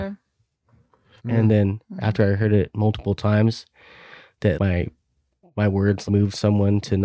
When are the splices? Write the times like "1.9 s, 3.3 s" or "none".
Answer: 1.2 s, 4.6 s, 6.1 s